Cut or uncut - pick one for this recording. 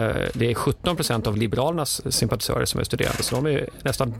uncut